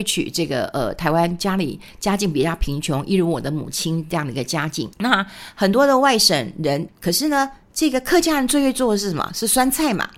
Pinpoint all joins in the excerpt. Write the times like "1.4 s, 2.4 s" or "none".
4.9 s, 6.9 s

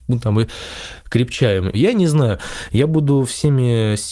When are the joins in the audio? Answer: 1.7 s

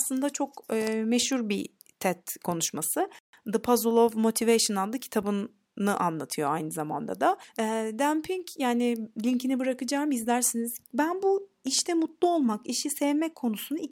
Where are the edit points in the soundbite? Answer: 10.9 s

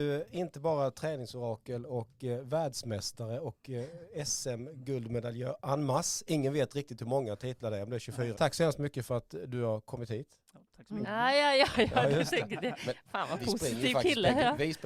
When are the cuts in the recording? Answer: 8.3 s, 11.0 s

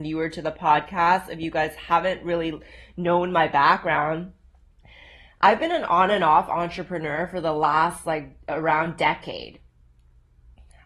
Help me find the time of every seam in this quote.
none

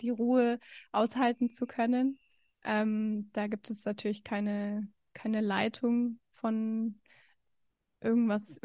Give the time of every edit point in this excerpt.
none

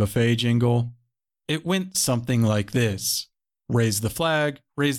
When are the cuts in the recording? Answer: none

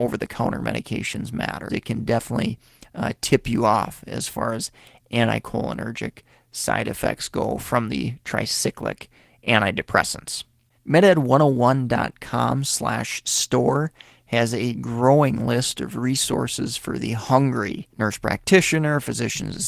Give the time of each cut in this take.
1.7 s, 10.8 s, 17.9 s

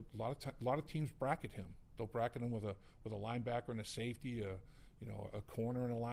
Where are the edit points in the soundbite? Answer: none

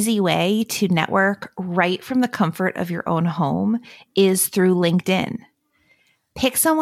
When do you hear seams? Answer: none

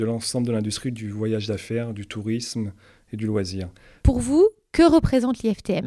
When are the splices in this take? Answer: 4.0 s

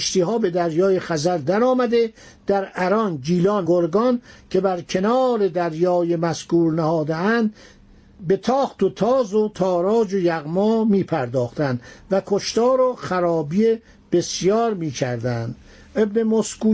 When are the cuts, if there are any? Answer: 3.7 s

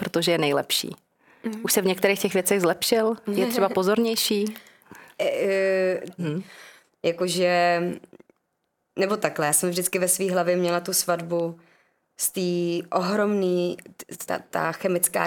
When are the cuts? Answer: 6.2 s, 14.3 s

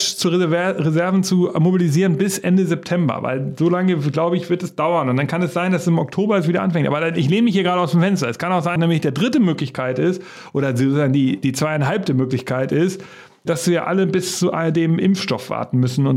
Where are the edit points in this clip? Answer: 8.8 s, 13.5 s

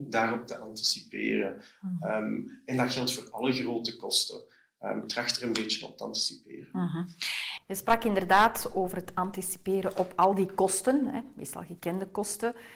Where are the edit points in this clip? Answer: none

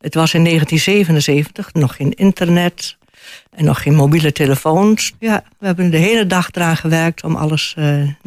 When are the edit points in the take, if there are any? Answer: 1.8 s, 5.1 s

